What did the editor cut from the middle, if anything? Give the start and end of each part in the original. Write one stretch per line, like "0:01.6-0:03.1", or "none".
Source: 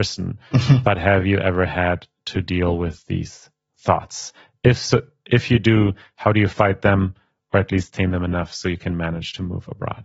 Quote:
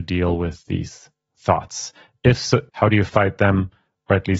0:05.1-0:06.1